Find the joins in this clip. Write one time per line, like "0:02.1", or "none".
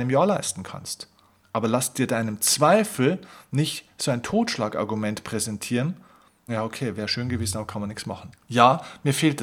0:01.4
0:06.5
0:08.3